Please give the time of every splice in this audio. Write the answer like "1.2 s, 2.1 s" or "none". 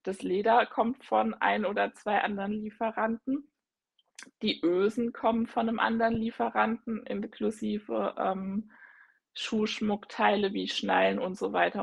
none